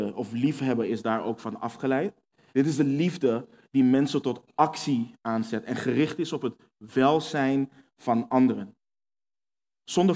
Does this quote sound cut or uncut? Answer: cut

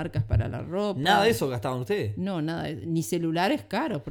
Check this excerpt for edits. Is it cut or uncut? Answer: uncut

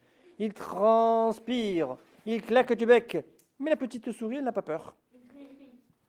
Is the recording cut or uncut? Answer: uncut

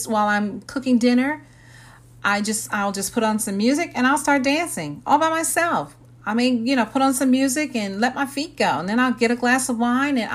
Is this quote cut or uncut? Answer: uncut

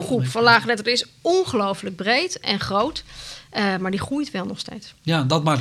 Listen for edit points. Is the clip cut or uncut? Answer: uncut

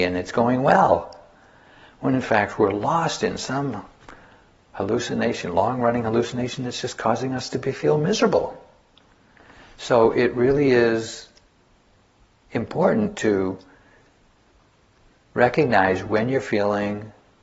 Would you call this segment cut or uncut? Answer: uncut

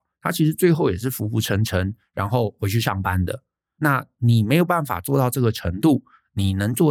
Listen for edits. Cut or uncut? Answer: uncut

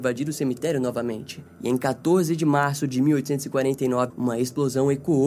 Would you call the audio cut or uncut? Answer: cut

